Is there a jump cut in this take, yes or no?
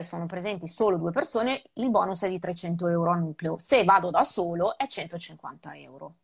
no